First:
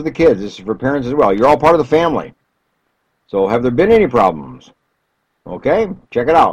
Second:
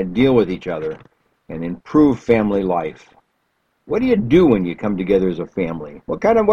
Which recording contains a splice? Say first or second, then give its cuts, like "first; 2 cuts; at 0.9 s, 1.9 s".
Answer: second; 1 cut; at 3.9 s